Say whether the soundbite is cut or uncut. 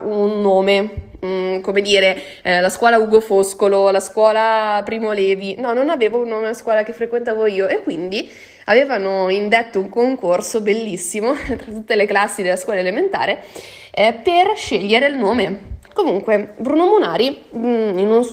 cut